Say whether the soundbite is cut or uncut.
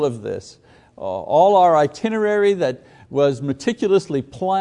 uncut